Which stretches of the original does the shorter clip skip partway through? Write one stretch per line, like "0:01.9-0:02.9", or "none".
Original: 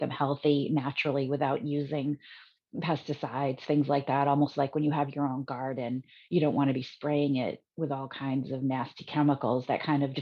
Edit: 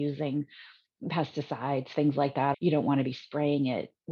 0:04.3-0:06.2